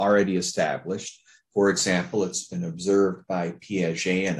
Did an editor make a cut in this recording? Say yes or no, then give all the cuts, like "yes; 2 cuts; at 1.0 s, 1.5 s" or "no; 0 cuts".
no; 0 cuts